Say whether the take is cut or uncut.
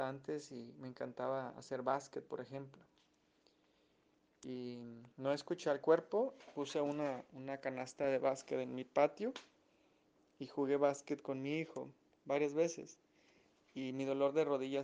cut